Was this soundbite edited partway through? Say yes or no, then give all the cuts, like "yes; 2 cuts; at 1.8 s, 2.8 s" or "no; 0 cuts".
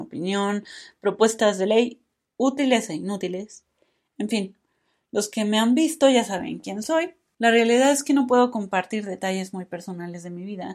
yes; 1 cut; at 7.3 s